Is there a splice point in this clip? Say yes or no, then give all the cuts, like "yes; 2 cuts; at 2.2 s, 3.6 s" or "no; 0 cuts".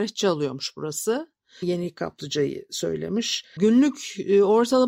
yes; 2 cuts; at 1.6 s, 3.6 s